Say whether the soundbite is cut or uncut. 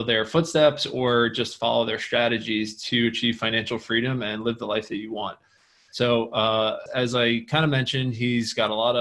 cut